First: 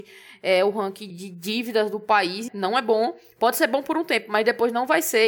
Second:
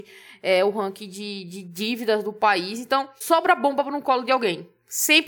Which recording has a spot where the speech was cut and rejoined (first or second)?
first